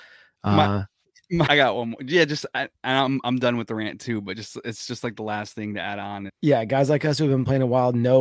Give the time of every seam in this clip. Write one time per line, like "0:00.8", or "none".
0:01.5
0:06.3